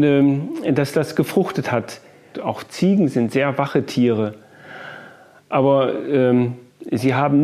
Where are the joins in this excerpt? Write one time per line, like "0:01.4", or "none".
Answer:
0:02.3